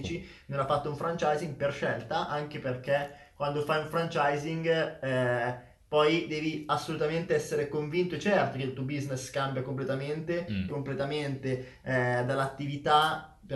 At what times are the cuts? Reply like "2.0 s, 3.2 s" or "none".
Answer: 10.7 s